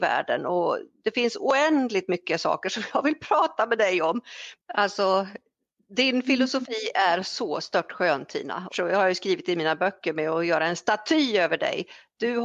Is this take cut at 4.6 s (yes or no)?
yes